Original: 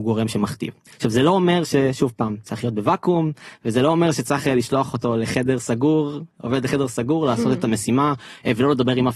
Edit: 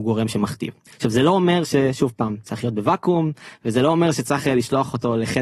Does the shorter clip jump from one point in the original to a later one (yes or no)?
no